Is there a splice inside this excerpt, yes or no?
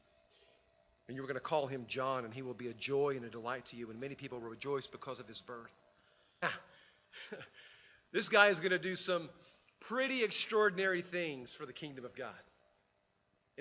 yes